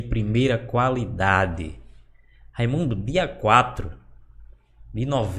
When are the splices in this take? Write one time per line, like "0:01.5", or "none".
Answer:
none